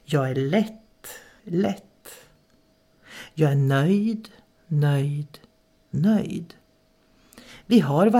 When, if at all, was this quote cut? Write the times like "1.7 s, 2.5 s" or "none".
1.4 s